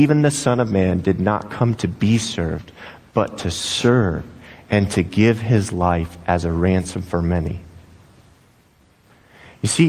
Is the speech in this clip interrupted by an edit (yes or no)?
no